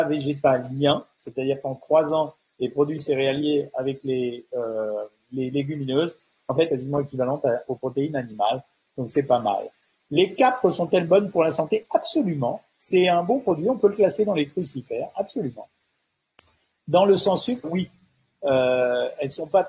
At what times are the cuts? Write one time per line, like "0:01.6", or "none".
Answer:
0:06.7
0:17.6